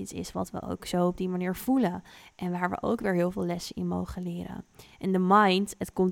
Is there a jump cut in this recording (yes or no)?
no